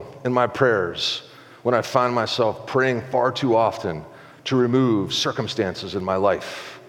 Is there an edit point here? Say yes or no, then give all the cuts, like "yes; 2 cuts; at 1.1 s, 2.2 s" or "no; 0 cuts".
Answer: no; 0 cuts